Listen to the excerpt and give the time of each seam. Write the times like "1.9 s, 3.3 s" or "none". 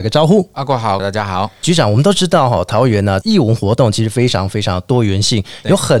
1.0 s